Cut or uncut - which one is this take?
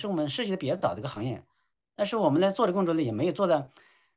uncut